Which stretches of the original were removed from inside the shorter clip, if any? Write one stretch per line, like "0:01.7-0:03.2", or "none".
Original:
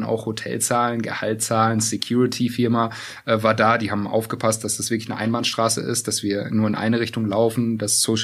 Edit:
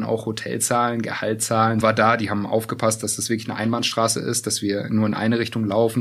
0:01.8-0:03.4